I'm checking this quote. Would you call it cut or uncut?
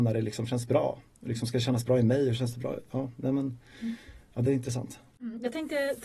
uncut